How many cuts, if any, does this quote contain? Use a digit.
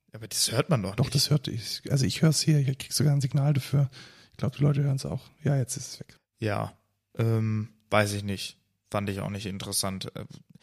1